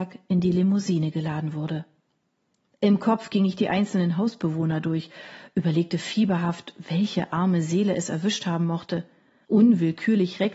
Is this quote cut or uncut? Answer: cut